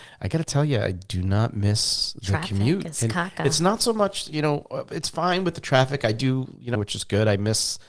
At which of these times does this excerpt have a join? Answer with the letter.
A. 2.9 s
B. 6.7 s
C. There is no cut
B